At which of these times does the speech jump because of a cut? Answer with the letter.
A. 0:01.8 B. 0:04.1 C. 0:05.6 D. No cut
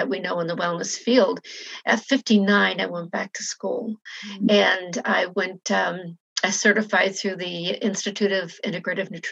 A